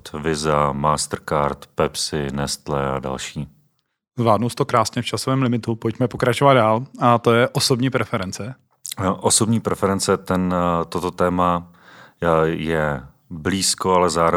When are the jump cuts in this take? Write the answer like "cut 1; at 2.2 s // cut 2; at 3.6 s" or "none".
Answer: none